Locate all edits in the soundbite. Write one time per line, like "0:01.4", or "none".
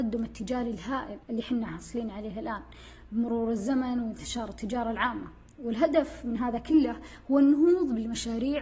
0:01.2